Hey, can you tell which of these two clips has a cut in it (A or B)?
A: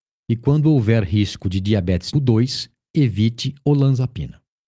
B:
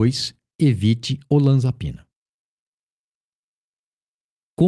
A